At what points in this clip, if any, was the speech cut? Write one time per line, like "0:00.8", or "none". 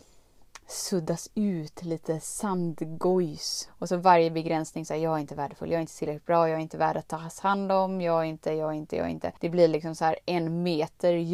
0:03.7
0:09.4